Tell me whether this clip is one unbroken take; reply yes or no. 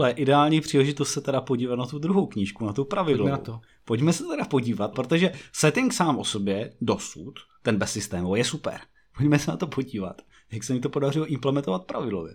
no